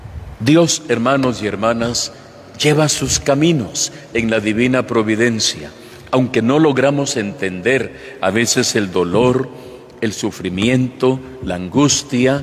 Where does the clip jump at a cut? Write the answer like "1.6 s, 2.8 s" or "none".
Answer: none